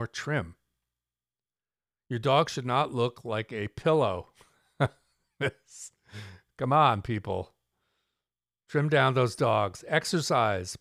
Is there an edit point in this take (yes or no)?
no